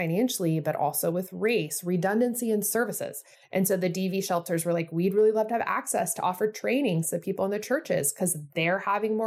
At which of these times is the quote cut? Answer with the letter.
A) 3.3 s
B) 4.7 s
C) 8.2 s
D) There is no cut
A